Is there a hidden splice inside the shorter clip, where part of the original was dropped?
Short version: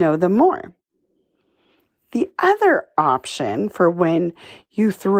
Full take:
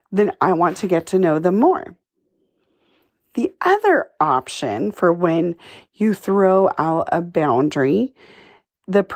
no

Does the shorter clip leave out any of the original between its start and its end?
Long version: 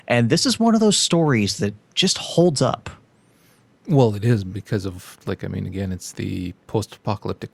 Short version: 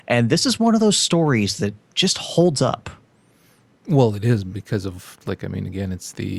no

